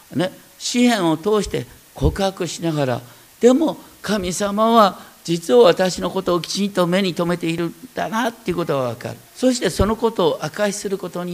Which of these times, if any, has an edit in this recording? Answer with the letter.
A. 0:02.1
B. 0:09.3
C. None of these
B